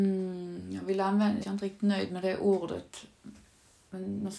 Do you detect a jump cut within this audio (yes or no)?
yes